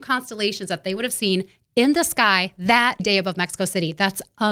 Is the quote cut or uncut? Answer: cut